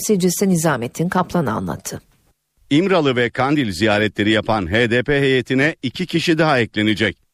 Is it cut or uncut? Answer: uncut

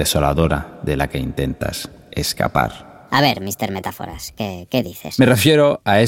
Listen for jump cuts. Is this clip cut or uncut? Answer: uncut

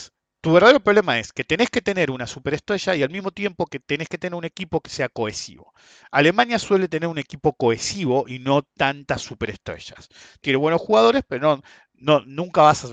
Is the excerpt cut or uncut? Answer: uncut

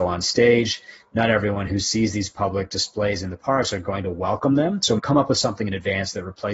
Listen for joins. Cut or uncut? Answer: cut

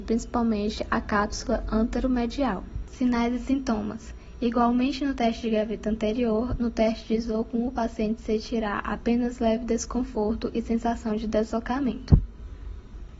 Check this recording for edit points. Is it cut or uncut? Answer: uncut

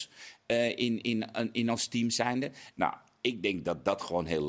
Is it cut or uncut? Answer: cut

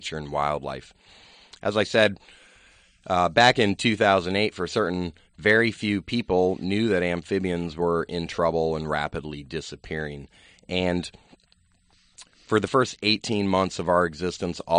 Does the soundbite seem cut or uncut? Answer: uncut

